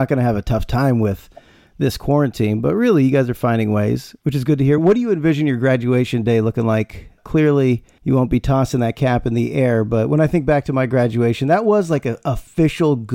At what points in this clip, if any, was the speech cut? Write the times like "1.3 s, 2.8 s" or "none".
none